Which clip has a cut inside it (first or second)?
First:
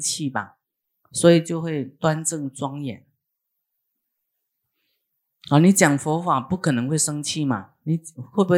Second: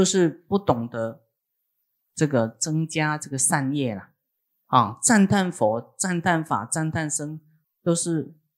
second